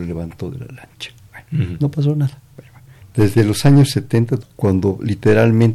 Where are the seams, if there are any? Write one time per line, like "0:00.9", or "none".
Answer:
0:03.0
0:04.4